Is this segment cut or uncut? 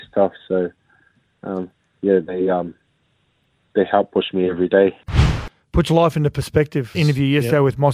cut